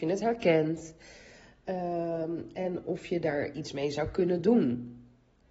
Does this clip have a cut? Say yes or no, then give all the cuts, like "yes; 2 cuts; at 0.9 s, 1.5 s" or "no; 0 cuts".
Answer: no; 0 cuts